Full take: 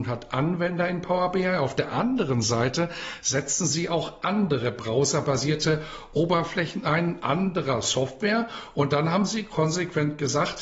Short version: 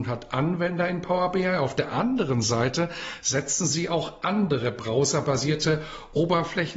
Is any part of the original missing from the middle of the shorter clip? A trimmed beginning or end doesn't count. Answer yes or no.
no